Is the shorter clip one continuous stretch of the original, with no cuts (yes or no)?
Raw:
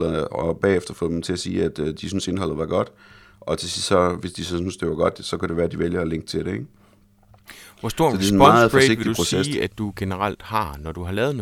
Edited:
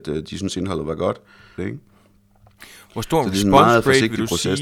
no